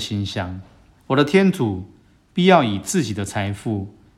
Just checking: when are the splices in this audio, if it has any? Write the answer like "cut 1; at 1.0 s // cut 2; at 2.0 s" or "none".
cut 1; at 1.0 s